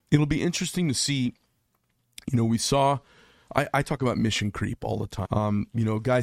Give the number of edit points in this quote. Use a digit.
1